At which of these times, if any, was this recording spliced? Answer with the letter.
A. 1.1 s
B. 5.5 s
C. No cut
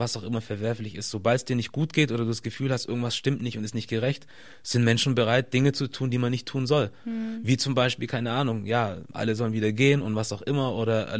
C